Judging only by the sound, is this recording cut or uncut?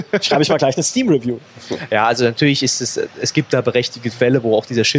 uncut